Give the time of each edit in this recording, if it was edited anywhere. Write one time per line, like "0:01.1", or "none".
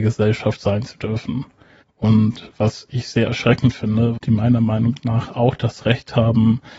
0:01.8
0:04.2